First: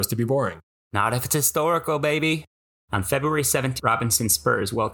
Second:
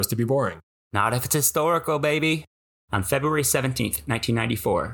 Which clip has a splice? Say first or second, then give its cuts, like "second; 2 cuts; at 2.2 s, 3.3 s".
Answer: first; 1 cut; at 3.8 s